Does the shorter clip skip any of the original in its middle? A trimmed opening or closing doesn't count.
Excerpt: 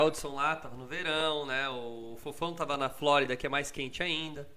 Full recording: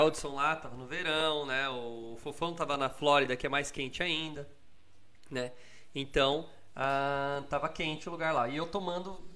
no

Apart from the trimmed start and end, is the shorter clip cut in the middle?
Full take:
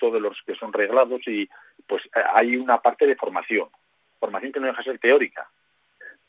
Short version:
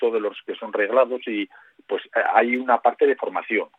no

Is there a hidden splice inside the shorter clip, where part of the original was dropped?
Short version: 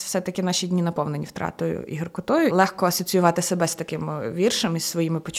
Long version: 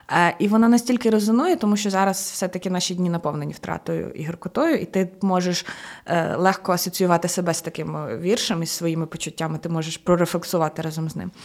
yes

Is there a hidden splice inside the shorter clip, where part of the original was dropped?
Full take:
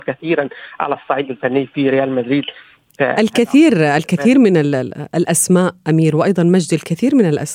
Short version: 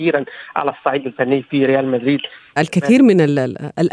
yes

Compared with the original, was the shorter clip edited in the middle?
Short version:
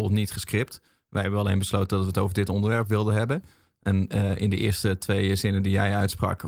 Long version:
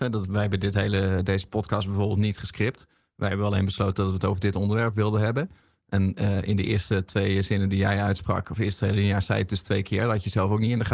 no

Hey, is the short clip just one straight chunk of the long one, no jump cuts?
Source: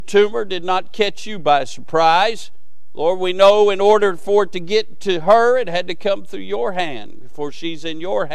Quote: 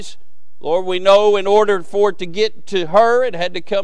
yes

